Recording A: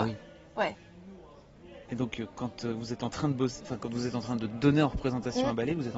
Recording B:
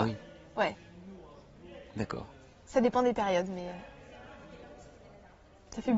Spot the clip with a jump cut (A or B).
A